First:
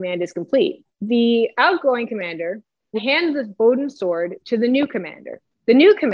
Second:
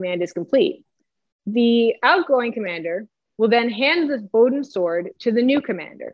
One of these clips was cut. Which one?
first; 2 cuts; at 0.9 s, 3.0 s

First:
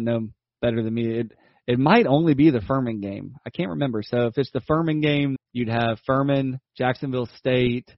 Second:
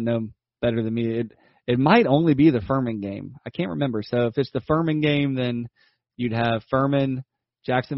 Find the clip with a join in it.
first; 2 cuts; at 5.4 s, 6.7 s

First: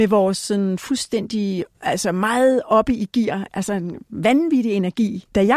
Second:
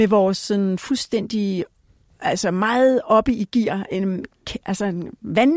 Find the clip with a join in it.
first; 2 cuts; at 1.7 s, 3.5 s

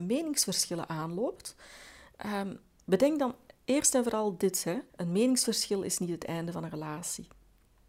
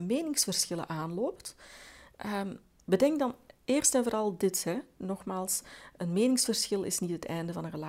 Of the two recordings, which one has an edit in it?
first; 1 cut; at 4.9 s

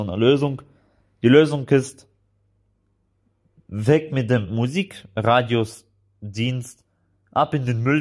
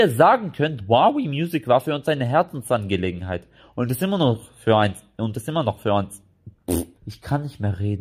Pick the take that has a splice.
second; 1 cut; at 6.9 s

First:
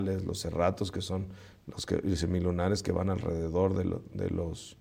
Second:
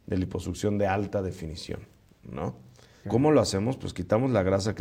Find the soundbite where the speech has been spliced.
second; 1 cut; at 3.0 s

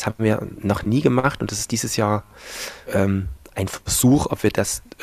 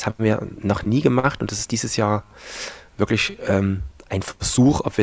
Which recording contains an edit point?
first; 1 cut; at 2.9 s

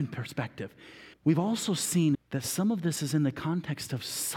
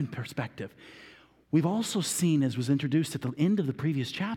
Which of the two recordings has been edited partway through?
first; 2 cuts; at 1.1 s, 2.1 s

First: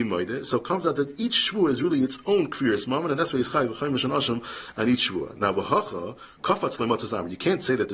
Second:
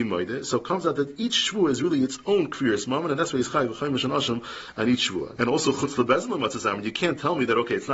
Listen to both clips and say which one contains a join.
second; 1 cut; at 5.4 s

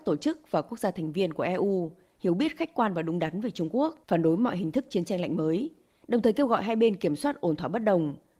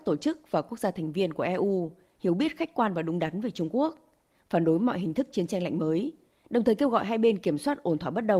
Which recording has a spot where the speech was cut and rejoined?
first; 1 cut; at 4.0 s

